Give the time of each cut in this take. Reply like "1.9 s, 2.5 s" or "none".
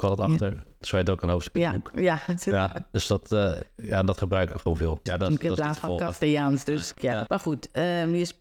5.1 s, 7.0 s